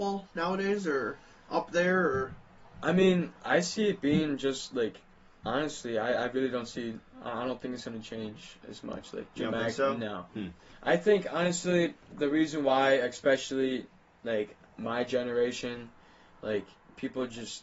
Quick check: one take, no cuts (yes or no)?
no